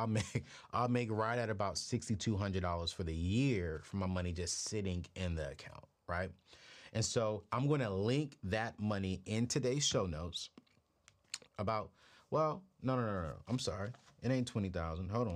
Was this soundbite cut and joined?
yes; 1 cut; at 11.5 s

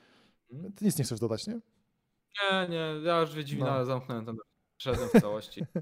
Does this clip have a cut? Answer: no; 0 cuts

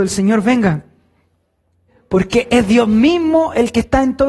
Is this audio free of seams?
yes; 0 cuts

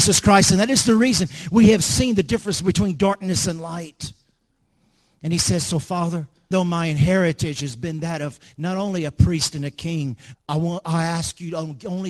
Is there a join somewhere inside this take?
yes; 2 cuts; at 6.5 s, 10.3 s

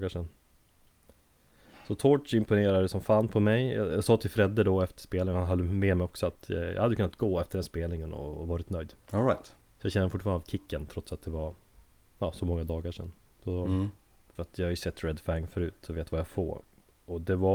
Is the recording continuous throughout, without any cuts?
no; 2 cuts; at 9.0 s, 14.4 s

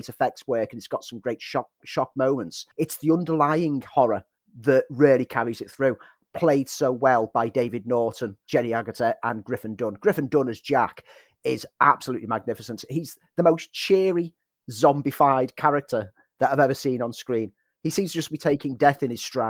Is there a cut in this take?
yes; 1 cut; at 2.7 s

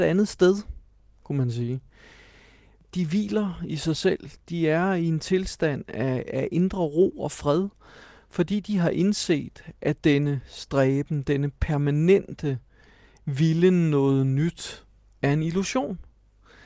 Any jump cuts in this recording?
no; 0 cuts

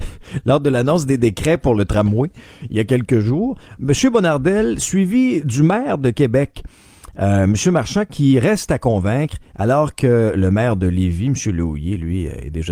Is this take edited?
no; 0 cuts

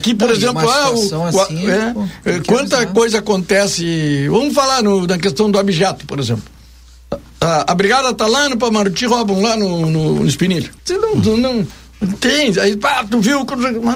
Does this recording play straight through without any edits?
no; 1 cut; at 10.8 s

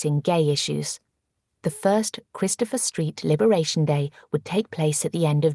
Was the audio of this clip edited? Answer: yes; 1 cut; at 1.6 s

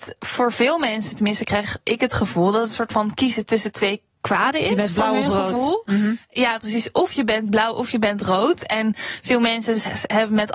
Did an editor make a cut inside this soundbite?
no; 0 cuts

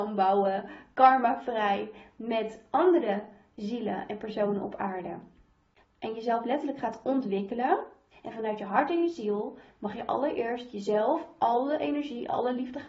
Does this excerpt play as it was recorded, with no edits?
no; 2 cuts; at 5.8 s, 8.1 s

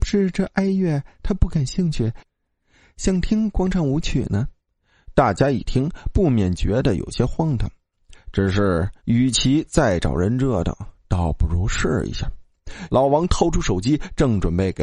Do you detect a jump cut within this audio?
yes; 2 cuts; at 9.0 s, 12.9 s

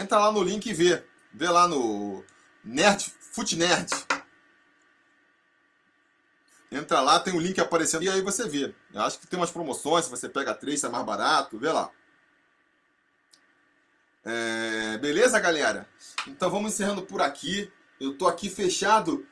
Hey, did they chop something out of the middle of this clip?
yes; 1 cut; at 8.0 s

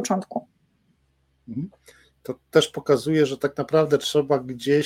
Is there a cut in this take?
no; 0 cuts

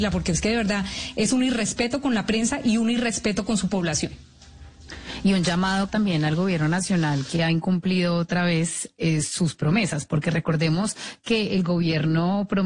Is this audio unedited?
no; 1 cut; at 5.9 s

